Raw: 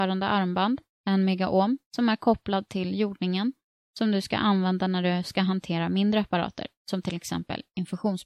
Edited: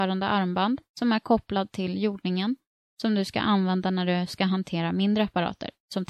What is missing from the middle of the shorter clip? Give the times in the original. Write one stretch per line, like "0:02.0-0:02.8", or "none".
0:00.9-0:01.9